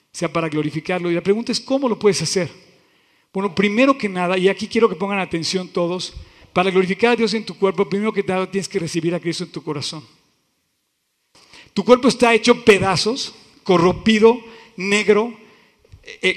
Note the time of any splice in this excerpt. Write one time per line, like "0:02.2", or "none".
none